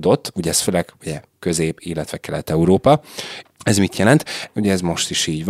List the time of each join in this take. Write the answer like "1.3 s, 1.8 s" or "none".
3.4 s, 4.5 s